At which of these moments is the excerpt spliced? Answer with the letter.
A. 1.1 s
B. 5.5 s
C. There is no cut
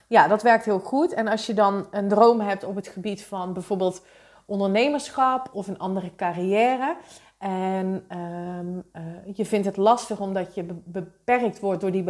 B